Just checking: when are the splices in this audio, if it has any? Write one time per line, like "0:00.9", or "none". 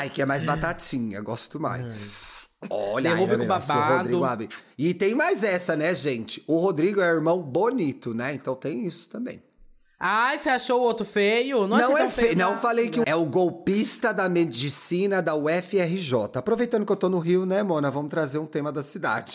0:02.7
0:13.0